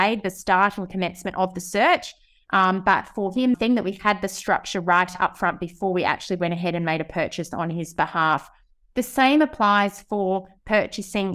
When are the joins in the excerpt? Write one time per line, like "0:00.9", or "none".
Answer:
0:03.5